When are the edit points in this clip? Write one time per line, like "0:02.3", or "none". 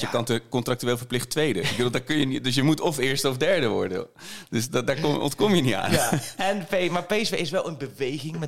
none